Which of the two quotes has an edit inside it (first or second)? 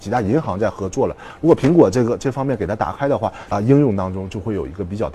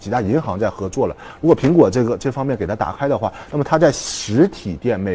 first